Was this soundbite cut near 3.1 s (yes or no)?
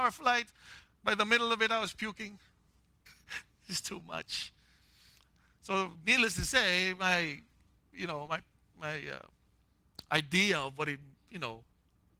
yes